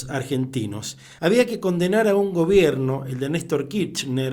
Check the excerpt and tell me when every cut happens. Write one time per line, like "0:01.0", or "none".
0:01.2